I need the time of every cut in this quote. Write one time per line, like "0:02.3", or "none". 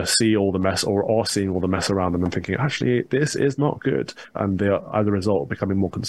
0:04.3